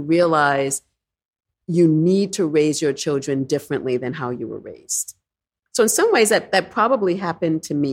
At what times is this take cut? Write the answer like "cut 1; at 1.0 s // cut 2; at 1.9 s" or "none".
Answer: none